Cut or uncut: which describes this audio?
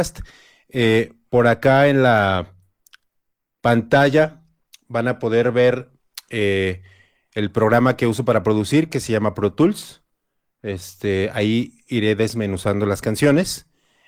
uncut